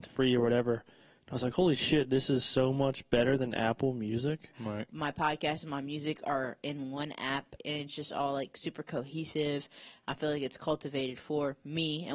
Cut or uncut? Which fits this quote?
cut